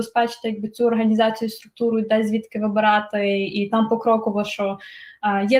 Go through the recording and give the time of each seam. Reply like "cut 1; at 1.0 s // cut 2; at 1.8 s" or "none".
none